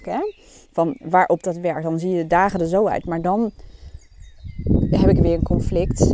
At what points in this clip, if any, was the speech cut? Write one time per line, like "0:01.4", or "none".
none